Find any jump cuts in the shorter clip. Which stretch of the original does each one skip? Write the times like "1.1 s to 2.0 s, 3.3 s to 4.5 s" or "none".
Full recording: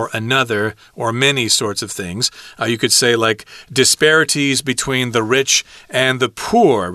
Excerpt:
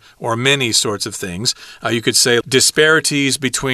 3.2 s to 3.6 s